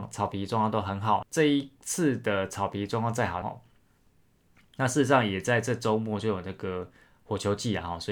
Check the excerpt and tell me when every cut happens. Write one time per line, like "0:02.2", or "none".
0:01.2
0:03.4